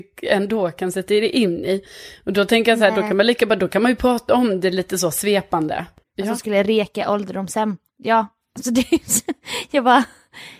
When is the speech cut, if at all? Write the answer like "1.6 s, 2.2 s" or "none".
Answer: 6.0 s